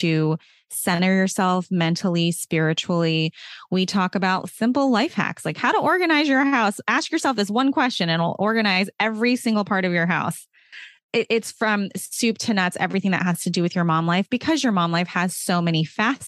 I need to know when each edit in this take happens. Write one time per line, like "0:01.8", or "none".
none